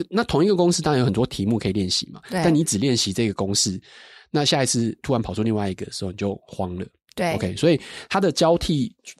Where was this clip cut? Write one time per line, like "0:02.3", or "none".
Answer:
none